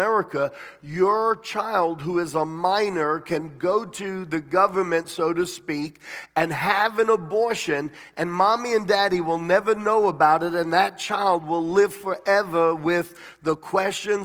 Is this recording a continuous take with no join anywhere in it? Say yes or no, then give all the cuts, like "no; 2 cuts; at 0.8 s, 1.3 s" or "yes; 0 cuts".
yes; 0 cuts